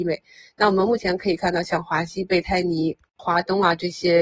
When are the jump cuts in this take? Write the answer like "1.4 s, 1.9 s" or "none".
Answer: 3.2 s